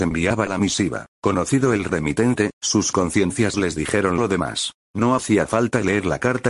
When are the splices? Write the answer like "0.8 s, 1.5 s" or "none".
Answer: 1.1 s, 4.8 s